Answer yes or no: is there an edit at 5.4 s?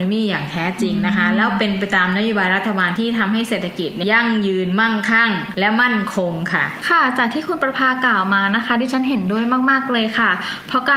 no